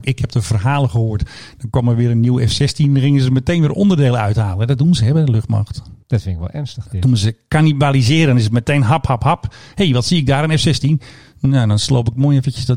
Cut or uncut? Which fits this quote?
cut